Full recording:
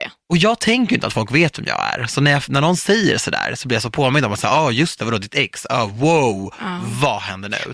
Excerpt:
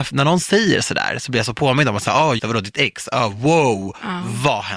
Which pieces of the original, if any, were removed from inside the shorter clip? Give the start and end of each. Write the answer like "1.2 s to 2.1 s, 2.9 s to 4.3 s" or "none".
4.7 s to 5.0 s